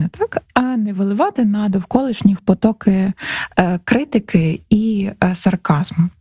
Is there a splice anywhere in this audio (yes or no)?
no